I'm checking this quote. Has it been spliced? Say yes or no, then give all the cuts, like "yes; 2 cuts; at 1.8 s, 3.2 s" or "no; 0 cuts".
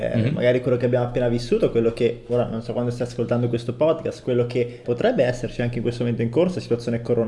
yes; 1 cut; at 4.8 s